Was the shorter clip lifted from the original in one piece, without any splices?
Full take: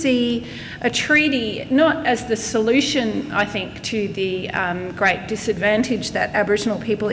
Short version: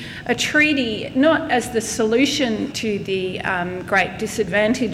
no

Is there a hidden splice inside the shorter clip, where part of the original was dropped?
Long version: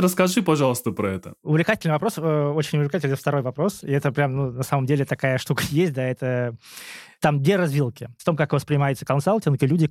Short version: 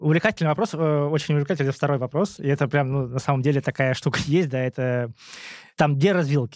no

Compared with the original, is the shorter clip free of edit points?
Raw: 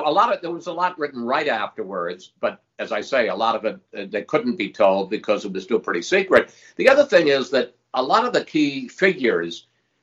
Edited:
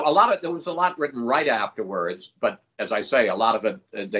yes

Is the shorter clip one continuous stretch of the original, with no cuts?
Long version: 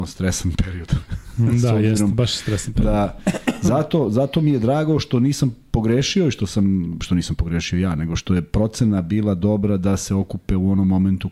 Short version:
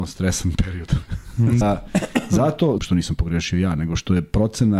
no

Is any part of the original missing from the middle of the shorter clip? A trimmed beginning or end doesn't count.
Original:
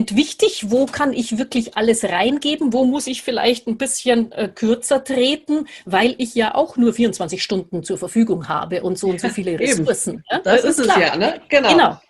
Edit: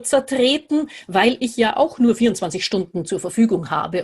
no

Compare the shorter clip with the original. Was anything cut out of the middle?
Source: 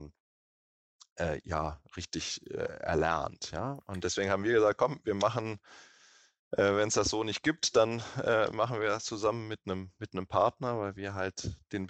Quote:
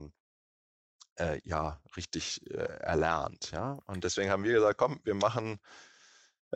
no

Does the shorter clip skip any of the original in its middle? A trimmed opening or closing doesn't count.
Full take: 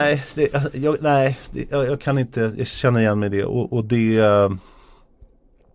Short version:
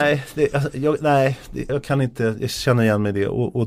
yes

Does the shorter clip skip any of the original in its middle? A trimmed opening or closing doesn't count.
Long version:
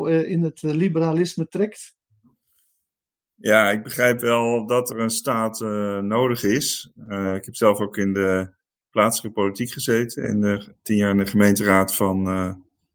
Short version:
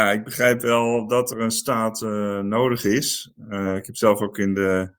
no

